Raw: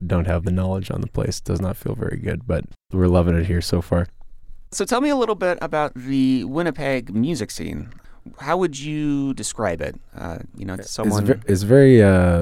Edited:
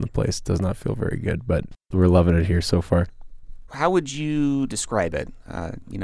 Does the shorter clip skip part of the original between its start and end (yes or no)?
yes